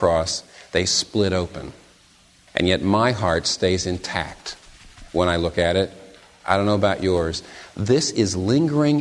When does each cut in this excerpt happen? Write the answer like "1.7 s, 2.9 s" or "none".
none